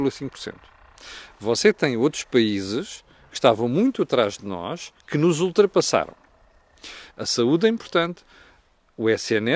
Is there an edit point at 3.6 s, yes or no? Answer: no